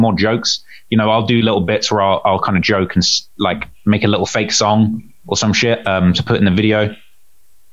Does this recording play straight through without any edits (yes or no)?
no